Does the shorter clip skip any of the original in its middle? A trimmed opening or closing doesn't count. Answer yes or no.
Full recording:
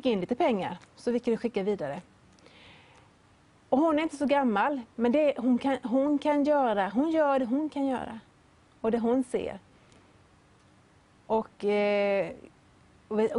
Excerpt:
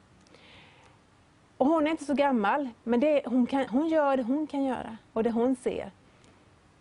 yes